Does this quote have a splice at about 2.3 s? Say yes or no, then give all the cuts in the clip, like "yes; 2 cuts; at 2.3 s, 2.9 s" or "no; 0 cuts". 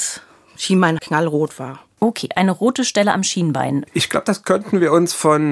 no; 2 cuts; at 1.0 s, 3.9 s